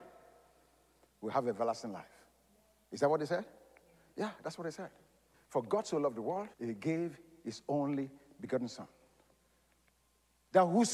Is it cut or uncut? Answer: cut